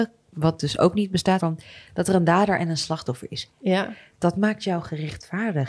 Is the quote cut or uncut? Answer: cut